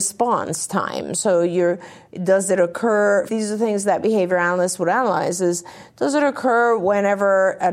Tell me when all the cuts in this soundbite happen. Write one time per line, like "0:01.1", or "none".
0:03.3